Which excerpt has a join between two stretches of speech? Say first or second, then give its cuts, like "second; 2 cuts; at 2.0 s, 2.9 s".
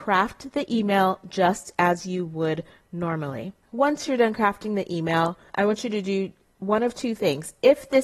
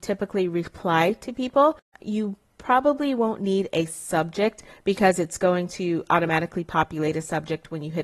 first; 2 cuts; at 3.6 s, 5.5 s